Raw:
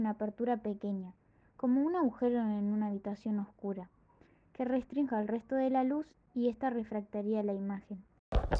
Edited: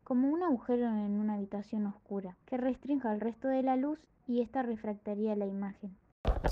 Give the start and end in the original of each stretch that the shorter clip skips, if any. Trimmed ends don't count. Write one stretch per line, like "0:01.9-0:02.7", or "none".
0:03.9-0:04.5